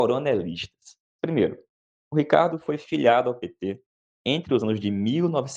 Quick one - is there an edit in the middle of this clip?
yes; 1 cut; at 1.2 s

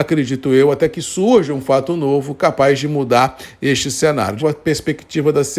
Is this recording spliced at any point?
yes; 1 cut; at 4.4 s

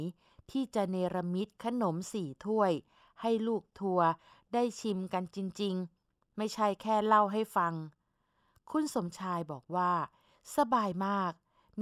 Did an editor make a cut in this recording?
no; 0 cuts

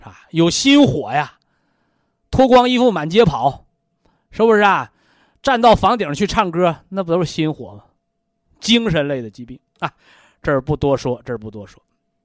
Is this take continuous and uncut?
yes; 0 cuts

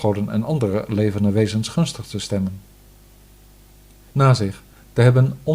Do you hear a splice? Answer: yes; 1 cut; at 4.1 s

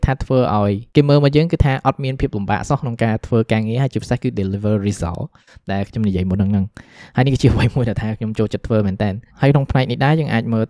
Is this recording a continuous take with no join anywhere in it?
no; 1 cut; at 9.3 s

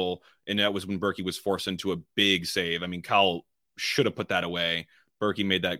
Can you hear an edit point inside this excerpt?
no; 0 cuts

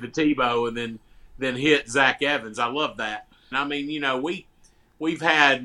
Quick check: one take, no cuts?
no; 1 cut; at 3.5 s

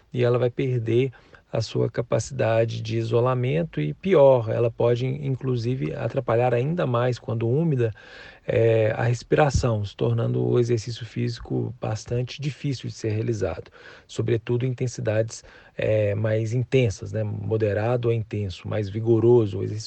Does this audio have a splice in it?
no; 0 cuts

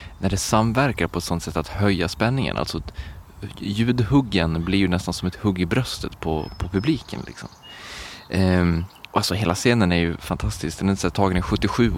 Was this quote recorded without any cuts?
yes; 0 cuts

